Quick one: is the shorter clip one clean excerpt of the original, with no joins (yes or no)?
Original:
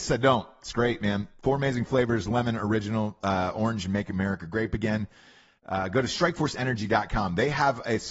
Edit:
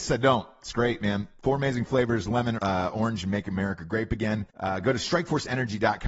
no